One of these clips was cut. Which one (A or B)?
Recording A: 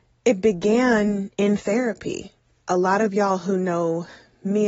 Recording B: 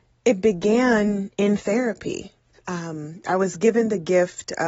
B